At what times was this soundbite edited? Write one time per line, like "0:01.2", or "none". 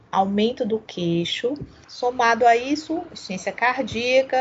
0:01.8